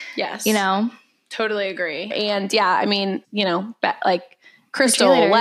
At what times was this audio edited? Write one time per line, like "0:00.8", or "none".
0:02.1
0:03.2